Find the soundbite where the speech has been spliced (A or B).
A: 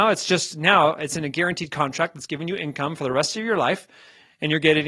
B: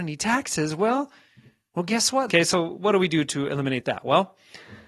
B